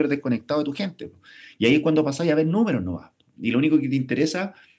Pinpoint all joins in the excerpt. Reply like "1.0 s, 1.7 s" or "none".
none